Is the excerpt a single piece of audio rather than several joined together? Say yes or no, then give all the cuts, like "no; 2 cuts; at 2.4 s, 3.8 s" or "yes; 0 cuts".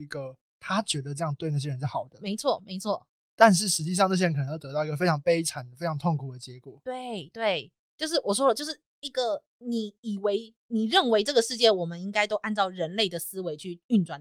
yes; 0 cuts